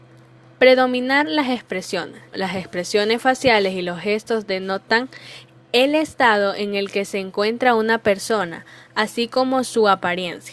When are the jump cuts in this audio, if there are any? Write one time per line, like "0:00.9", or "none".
0:02.3